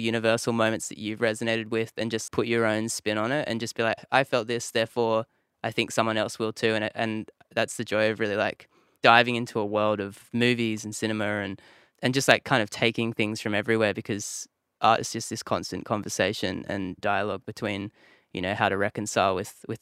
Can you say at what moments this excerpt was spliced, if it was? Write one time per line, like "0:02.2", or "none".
0:02.3